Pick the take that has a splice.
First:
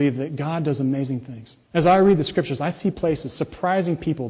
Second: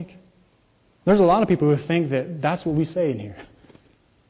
first; 1 cut; at 1.6 s

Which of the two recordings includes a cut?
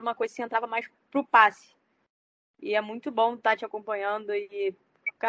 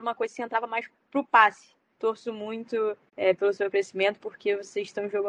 second; 3 cuts; at 1.9 s, 3.1 s, 4.2 s

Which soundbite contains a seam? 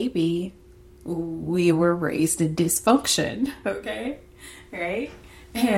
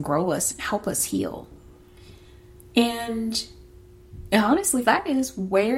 second; 1 cut; at 4.8 s

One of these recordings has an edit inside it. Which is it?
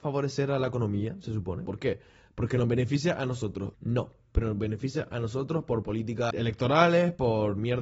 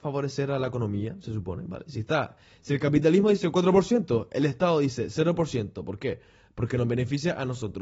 first; 2 cuts; at 1.7 s, 3.7 s

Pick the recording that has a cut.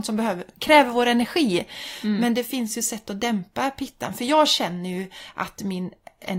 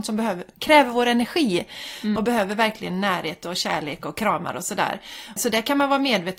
second; 2 cuts; at 2.2 s, 5.4 s

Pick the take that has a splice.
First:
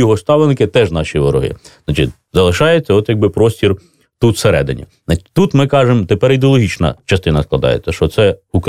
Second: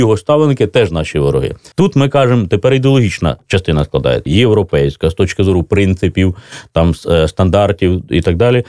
second; 2 cuts; at 1.7 s, 4.3 s

